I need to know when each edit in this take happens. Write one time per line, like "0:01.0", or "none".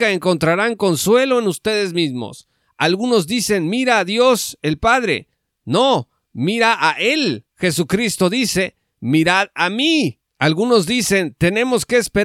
none